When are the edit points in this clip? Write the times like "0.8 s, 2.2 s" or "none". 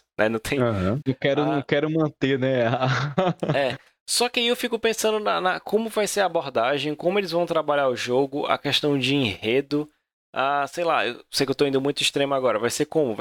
1.0 s